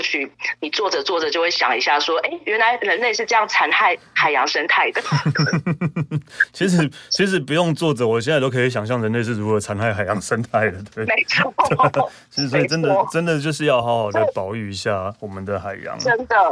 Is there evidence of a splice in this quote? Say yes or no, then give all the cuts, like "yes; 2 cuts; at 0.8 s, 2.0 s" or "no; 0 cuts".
no; 0 cuts